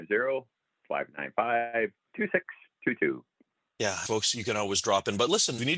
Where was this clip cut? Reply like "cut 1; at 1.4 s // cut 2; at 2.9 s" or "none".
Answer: cut 1; at 4.1 s

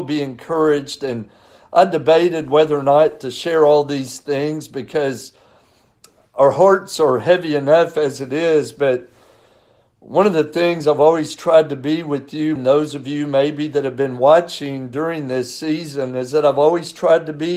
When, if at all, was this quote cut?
cut 1; at 12.6 s

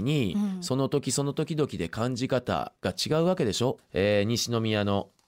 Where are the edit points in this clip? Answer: cut 1; at 2.8 s // cut 2; at 3.8 s

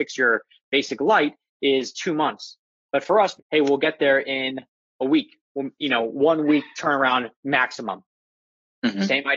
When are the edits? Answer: cut 1; at 3.4 s // cut 2; at 7.4 s

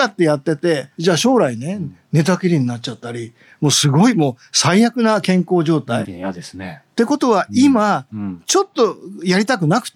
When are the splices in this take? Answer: cut 1; at 6.0 s // cut 2; at 8.1 s

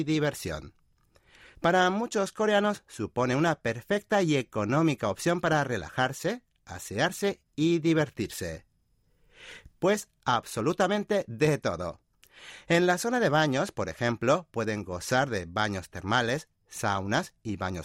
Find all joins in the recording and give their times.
cut 1; at 1.5 s // cut 2; at 9.7 s

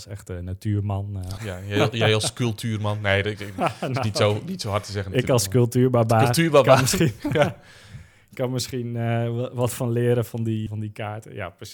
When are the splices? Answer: cut 1; at 1.4 s // cut 2; at 10.7 s

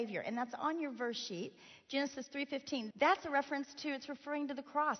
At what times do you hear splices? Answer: cut 1; at 2.9 s

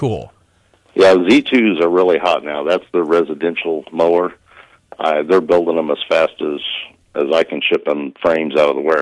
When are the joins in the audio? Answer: none

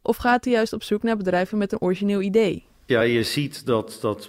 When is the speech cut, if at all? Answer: none

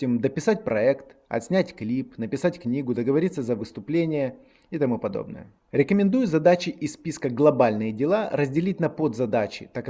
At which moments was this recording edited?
none

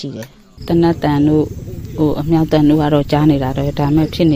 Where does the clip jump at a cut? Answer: none

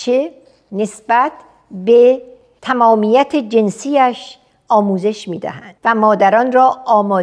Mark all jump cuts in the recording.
cut 1; at 5.8 s

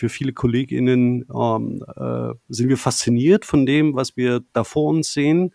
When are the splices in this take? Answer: none

